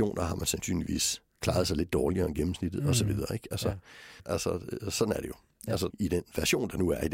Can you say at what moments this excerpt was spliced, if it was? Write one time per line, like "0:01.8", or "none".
0:04.2
0:05.9